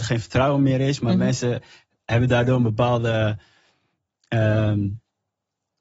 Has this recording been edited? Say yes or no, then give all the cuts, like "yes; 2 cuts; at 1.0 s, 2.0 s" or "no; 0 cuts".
no; 0 cuts